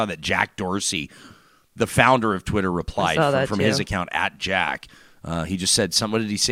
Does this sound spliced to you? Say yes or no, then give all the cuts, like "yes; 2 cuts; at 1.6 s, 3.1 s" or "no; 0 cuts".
no; 0 cuts